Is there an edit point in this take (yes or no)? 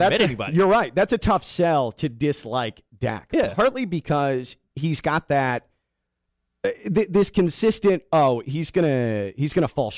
no